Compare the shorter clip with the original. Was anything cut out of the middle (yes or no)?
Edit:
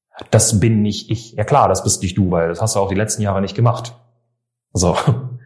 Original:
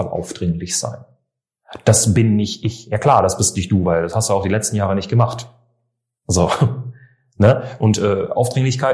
no